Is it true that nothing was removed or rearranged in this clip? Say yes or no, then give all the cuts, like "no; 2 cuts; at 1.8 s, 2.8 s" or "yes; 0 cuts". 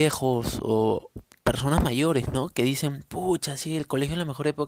yes; 0 cuts